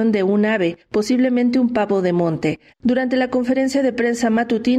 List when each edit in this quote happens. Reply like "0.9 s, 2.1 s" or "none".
2.7 s